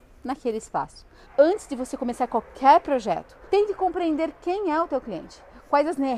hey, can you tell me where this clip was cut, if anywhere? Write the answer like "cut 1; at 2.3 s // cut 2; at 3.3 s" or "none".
cut 1; at 1.3 s // cut 2; at 3.5 s